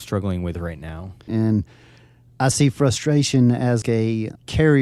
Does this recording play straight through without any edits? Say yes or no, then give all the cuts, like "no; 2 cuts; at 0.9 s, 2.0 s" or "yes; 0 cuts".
no; 2 cuts; at 1.3 s, 3.8 s